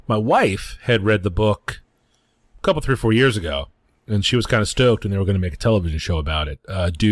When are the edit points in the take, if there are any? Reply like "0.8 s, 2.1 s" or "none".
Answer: none